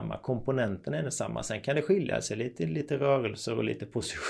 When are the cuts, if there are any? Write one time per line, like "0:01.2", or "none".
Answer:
none